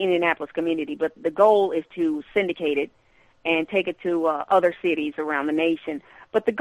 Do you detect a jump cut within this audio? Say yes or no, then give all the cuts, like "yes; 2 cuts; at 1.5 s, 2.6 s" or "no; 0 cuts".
yes; 1 cut; at 1.2 s